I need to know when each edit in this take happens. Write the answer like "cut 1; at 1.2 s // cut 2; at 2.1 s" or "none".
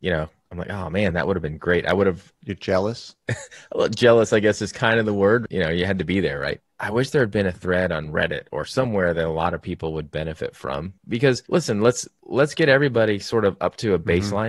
none